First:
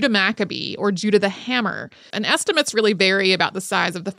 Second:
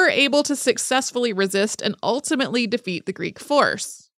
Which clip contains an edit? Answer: first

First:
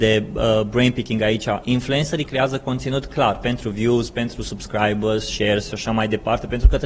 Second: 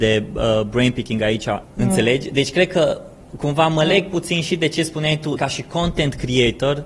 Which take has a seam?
second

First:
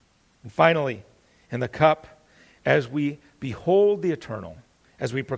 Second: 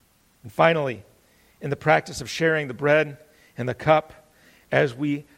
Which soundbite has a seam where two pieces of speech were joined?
first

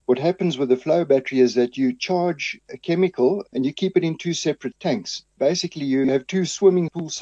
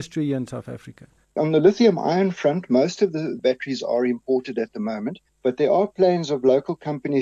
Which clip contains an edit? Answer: first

